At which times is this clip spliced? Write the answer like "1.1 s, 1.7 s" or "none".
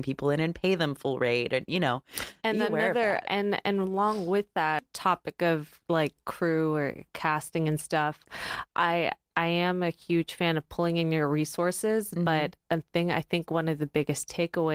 none